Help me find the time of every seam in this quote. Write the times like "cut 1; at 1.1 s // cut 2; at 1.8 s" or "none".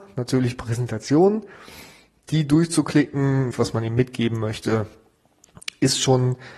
cut 1; at 3.5 s